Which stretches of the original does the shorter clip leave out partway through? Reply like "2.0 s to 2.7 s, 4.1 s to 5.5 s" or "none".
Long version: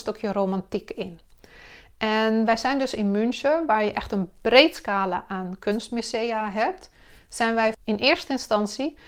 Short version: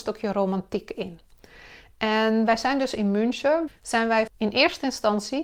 3.7 s to 7.1 s